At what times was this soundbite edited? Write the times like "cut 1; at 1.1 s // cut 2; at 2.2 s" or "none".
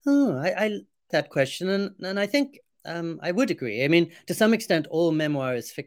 cut 1; at 1.1 s